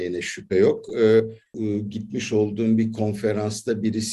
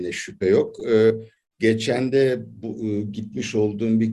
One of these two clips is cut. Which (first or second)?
first